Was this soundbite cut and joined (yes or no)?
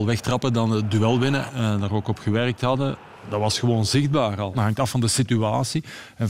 yes